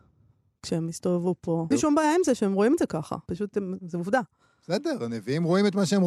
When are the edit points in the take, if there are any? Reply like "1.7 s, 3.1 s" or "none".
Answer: 1.7 s, 3.3 s